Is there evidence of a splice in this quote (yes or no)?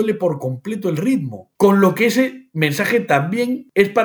no